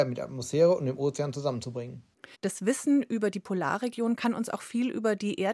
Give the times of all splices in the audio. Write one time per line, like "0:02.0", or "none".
0:02.3